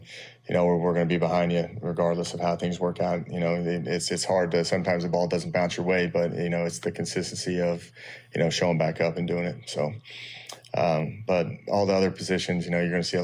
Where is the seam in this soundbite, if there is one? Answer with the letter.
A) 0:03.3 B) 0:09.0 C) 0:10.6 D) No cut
D